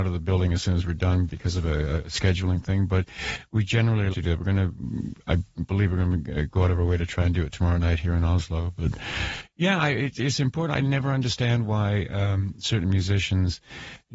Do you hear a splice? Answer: yes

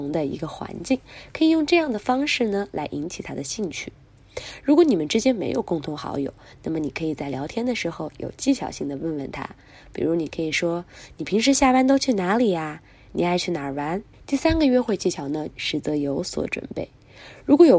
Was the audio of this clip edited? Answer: yes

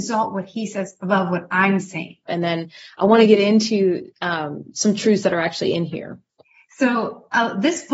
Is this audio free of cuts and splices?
no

